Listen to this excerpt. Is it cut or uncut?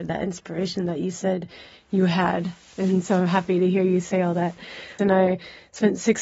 cut